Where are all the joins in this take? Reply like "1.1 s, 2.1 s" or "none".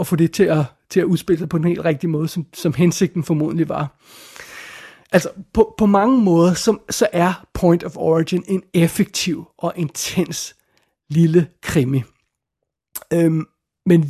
none